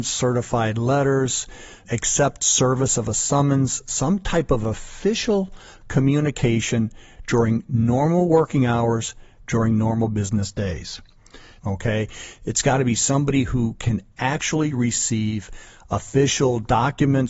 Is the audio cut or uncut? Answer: cut